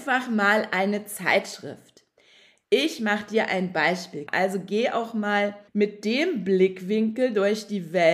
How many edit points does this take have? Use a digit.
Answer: 2